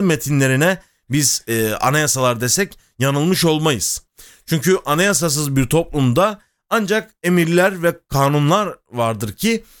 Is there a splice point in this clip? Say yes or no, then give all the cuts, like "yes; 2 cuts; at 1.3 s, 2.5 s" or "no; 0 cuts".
no; 0 cuts